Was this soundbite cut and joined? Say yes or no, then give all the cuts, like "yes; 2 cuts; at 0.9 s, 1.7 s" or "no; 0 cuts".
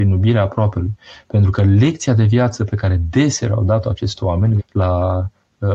yes; 1 cut; at 4.6 s